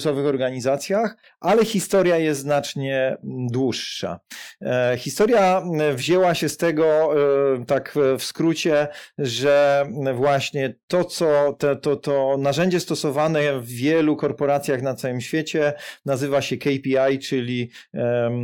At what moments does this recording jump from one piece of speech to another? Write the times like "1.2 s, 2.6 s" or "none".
none